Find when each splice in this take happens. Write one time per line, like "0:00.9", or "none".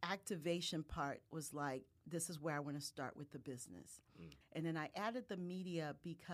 0:04.4